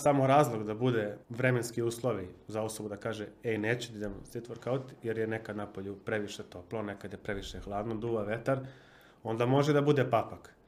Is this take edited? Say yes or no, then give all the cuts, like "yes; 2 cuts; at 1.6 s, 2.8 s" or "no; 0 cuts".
yes; 1 cut; at 1.2 s